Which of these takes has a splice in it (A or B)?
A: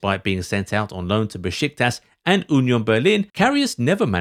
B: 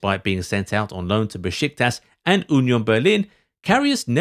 A